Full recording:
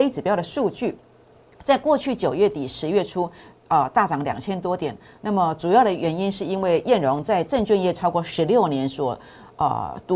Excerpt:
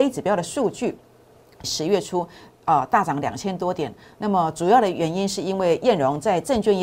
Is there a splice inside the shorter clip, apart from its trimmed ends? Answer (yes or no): yes